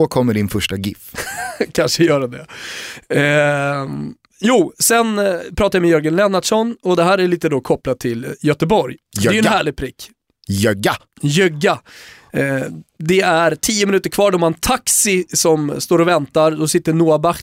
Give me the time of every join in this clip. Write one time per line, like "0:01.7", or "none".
0:09.1

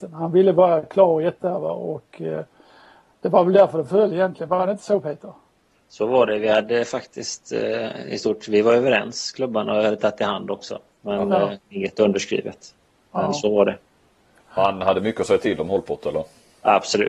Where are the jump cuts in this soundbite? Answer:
none

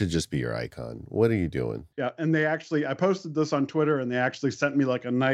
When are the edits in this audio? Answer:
0:01.9

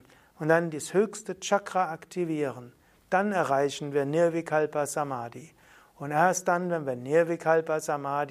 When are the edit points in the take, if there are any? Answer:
none

